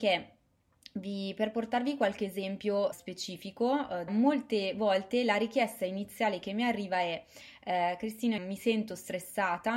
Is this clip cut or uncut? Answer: cut